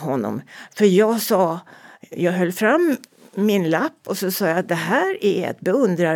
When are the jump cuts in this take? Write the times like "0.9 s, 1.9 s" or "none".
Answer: none

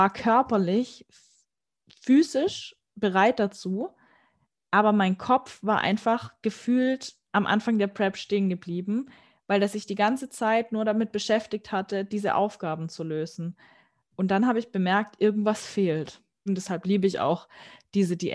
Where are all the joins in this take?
16.5 s

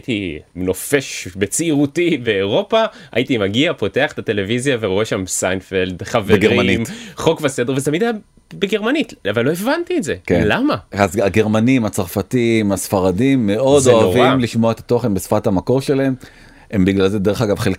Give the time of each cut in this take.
none

